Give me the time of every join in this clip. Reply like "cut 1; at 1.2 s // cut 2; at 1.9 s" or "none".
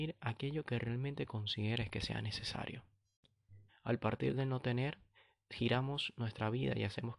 cut 1; at 3.7 s

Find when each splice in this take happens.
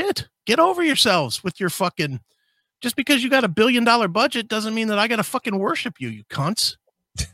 none

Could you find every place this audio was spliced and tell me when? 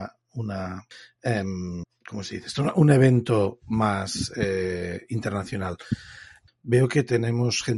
cut 1; at 6.5 s

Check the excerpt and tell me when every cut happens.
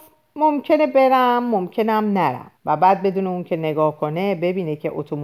cut 1; at 2.6 s

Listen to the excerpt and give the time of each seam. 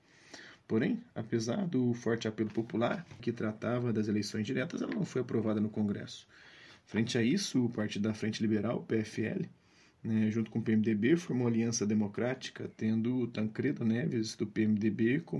cut 1; at 3.2 s

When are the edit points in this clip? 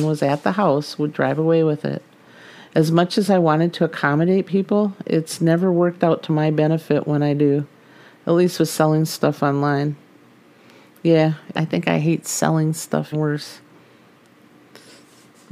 cut 1; at 11.5 s // cut 2; at 13.1 s

